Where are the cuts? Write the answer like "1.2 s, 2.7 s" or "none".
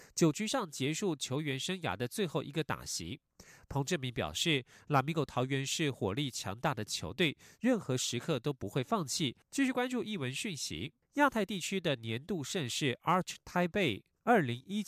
9.4 s, 11.0 s